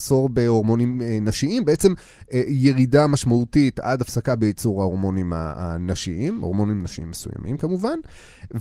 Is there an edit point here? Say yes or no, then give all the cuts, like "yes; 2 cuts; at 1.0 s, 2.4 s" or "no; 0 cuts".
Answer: no; 0 cuts